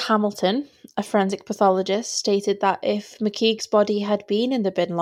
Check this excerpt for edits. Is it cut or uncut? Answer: uncut